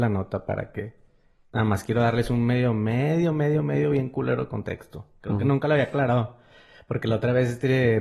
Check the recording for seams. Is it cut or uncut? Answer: uncut